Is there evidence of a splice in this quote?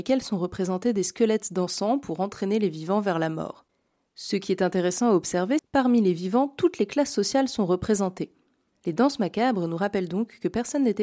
yes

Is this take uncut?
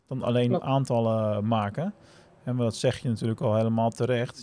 yes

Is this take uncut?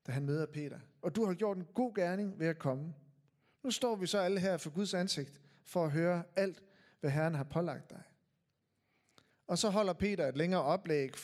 no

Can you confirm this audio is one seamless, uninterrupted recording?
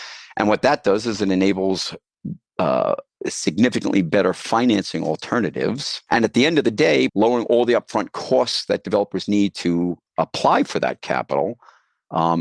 no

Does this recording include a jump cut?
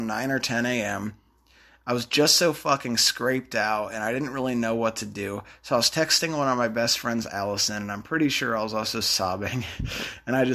no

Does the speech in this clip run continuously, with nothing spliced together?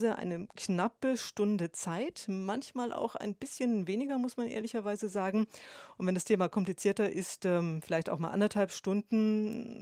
yes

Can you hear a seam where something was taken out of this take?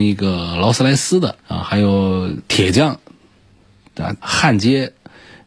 yes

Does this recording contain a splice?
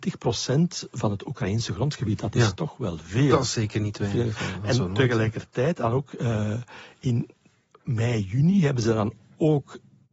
no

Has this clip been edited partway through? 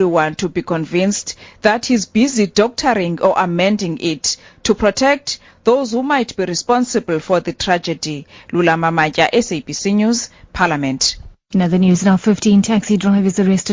no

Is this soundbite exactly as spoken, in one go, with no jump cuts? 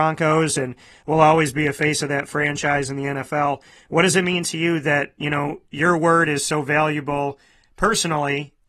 yes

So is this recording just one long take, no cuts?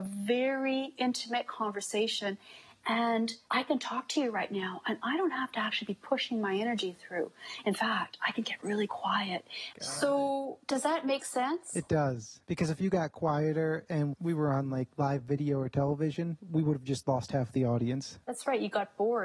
no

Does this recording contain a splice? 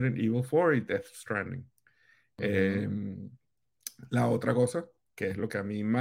no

